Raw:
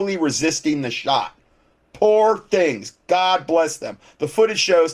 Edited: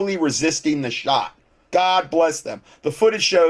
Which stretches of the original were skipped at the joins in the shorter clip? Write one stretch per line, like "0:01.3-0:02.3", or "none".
0:01.6-0:03.0